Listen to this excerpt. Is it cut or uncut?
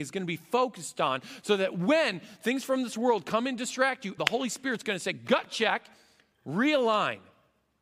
cut